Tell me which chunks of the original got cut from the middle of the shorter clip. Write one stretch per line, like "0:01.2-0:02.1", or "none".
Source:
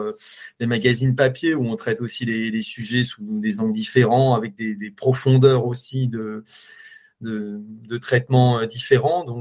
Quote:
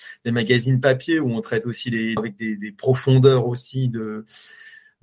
0:02.5-0:04.4